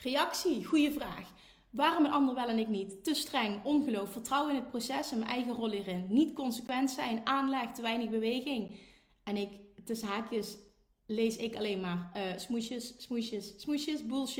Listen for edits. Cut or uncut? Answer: uncut